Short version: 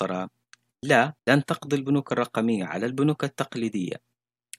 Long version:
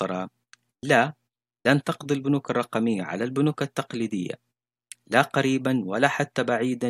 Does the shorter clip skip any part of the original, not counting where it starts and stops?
yes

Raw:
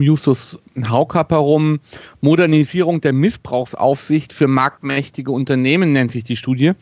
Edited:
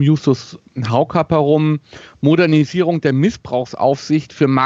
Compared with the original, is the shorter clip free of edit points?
yes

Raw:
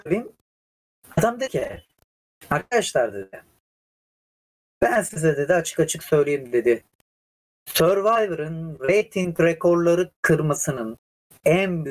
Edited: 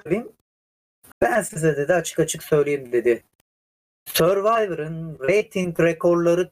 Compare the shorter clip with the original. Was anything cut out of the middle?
yes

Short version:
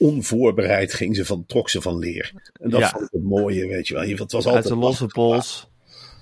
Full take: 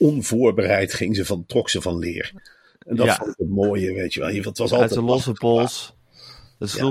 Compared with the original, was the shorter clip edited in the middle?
yes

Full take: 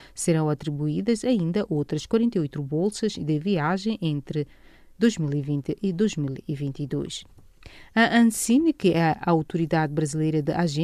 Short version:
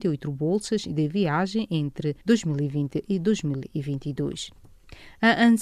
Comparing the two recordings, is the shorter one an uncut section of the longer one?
no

